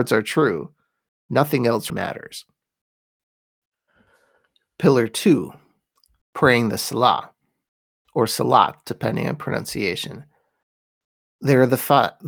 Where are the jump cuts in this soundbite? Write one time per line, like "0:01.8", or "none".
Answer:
0:01.9